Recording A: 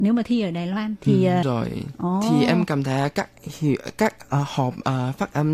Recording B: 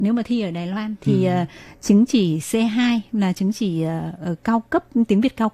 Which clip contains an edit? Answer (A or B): A